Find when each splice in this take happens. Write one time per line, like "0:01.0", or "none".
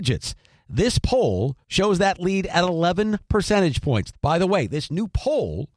0:04.1